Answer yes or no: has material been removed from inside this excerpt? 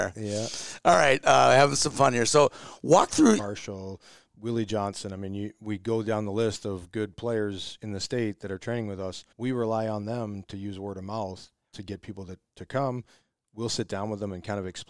yes